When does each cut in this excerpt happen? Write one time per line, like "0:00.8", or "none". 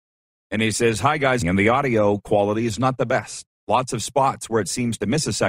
0:01.4
0:03.5